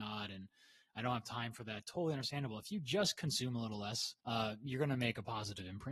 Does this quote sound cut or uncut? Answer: cut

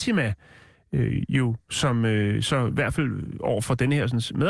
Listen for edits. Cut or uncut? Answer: uncut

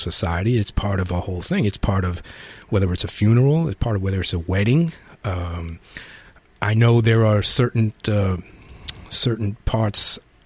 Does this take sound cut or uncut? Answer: uncut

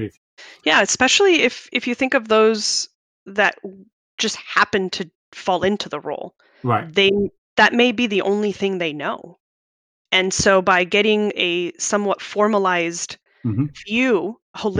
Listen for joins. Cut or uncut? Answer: uncut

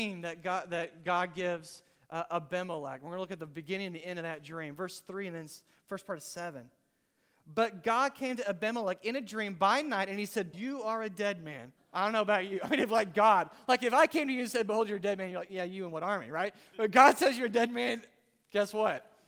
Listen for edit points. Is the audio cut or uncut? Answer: cut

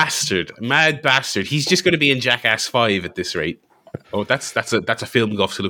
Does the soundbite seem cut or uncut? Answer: cut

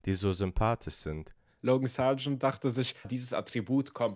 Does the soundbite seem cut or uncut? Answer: cut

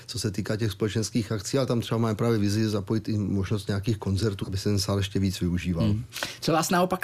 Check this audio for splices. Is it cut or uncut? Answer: cut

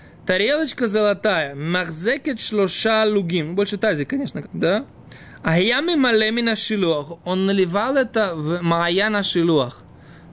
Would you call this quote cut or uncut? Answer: cut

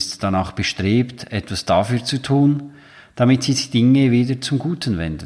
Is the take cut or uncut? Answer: uncut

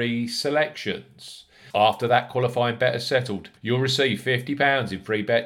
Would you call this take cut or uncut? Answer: cut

